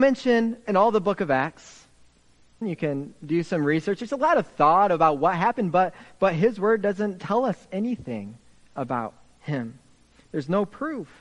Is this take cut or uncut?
cut